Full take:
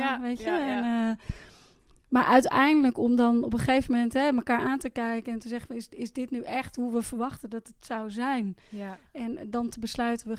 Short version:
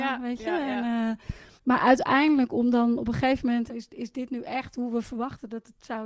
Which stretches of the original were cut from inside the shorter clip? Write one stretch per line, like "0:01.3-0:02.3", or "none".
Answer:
0:01.6-0:02.0
0:04.1-0:05.7